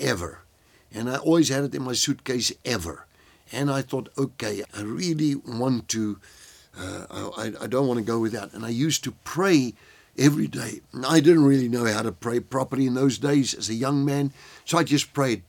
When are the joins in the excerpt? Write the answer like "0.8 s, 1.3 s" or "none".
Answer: 4.7 s